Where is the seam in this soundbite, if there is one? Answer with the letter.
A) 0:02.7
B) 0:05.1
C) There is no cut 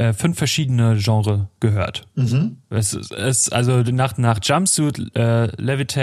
C